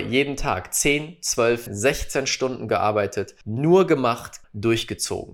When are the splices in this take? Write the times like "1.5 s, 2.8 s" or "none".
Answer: 1.7 s, 3.4 s, 4.4 s